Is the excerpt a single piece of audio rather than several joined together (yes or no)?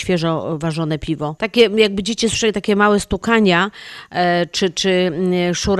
no